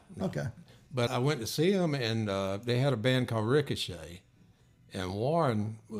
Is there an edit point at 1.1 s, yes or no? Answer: yes